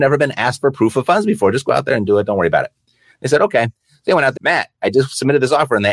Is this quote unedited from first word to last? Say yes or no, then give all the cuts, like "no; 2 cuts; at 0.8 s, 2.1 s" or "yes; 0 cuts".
no; 1 cut; at 4.4 s